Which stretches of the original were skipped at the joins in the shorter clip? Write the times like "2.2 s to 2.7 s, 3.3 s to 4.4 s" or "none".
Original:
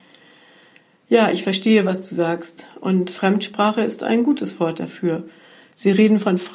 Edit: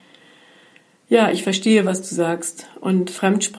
none